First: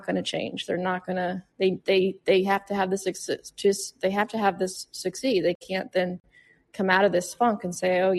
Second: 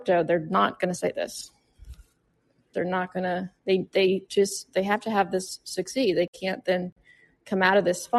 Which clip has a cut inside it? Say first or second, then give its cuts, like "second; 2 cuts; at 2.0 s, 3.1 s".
second; 2 cuts; at 2.7 s, 4.3 s